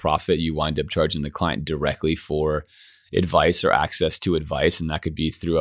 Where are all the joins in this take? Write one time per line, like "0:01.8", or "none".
none